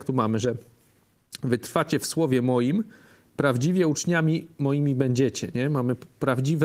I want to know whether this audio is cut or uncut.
uncut